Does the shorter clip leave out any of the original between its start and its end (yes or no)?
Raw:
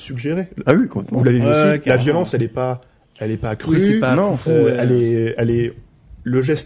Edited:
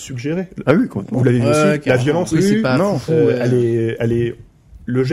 yes